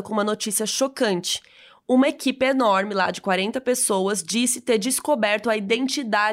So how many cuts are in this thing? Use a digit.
0